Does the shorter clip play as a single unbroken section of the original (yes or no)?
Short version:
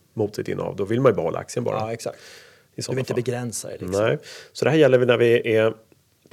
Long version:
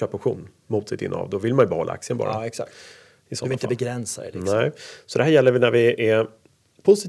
yes